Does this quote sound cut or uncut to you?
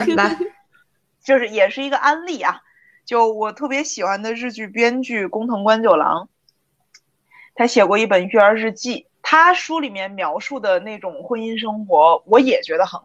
cut